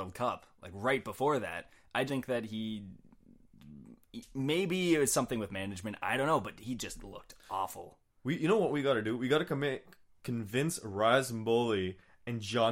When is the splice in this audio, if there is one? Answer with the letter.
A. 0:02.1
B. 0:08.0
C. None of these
A